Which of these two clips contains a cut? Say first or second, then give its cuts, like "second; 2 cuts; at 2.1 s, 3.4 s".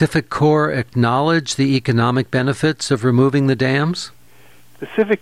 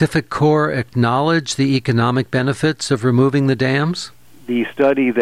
second; 1 cut; at 4.2 s